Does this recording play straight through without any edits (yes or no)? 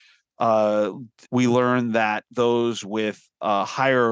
no